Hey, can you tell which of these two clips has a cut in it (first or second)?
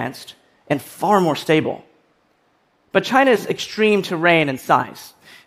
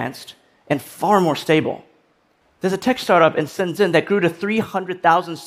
second